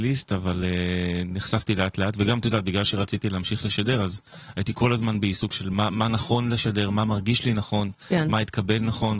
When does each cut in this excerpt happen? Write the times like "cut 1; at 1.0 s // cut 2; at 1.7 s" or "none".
none